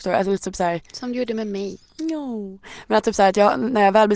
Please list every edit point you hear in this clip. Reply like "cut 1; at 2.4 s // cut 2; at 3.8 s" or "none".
none

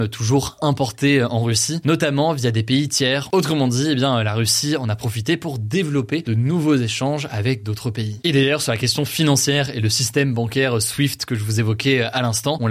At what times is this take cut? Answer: cut 1; at 3.3 s

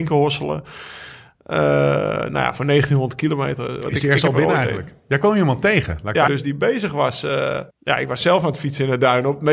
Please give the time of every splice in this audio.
cut 1; at 6.3 s // cut 2; at 7.7 s

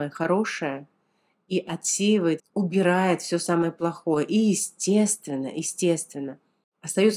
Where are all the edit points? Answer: cut 1; at 2.4 s

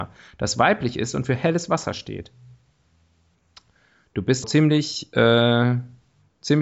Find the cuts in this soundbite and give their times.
cut 1; at 4.4 s

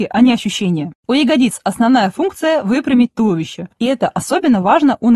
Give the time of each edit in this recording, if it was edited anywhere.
cut 1; at 3.7 s

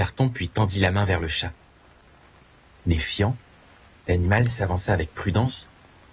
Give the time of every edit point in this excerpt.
none

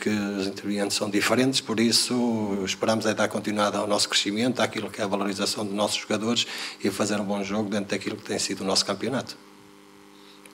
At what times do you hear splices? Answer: none

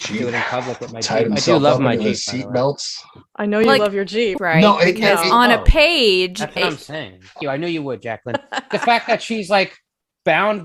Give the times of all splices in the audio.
cut 1; at 4.4 s // cut 2; at 7.4 s // cut 3; at 8.7 s

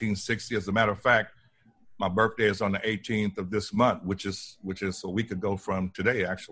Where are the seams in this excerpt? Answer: none

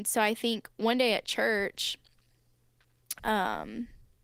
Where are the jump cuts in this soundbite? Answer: cut 1; at 3.2 s

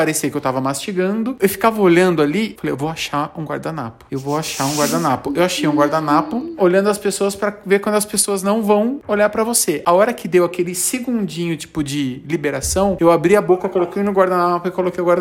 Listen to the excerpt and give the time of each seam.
cut 1; at 6.6 s

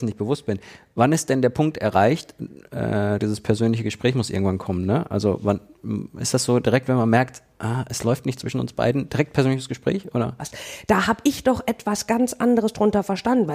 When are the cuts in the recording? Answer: cut 1; at 3.2 s // cut 2; at 10.4 s

